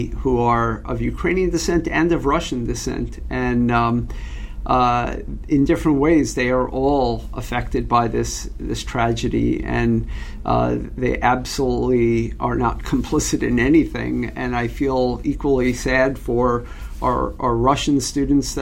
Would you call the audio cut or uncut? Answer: uncut